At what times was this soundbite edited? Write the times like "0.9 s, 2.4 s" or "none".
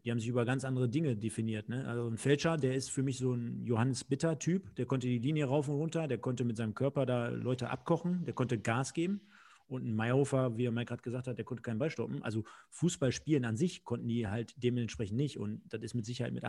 none